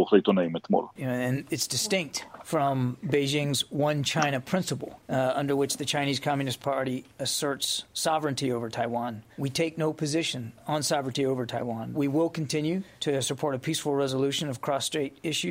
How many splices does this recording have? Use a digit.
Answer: 1